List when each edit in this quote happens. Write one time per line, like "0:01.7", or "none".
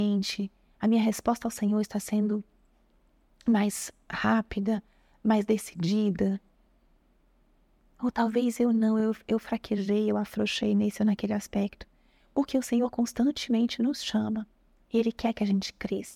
none

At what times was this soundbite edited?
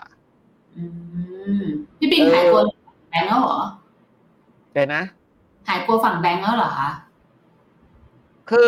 none

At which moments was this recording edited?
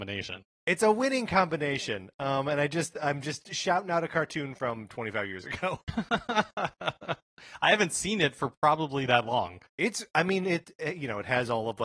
0:09.7

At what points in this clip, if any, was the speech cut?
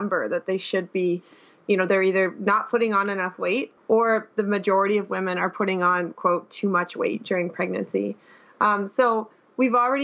0:03.8

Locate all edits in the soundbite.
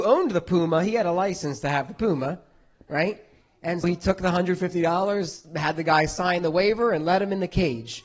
0:03.8

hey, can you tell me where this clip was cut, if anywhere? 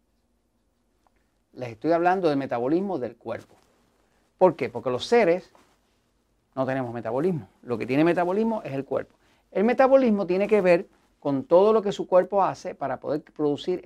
none

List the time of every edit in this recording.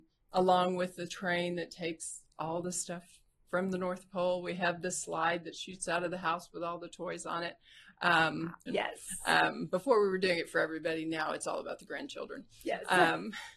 0:08.7

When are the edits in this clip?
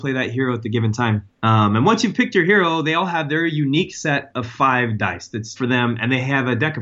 0:01.3
0:05.6

